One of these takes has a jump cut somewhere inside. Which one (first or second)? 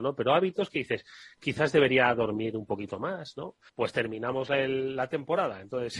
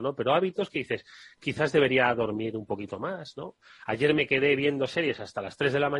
first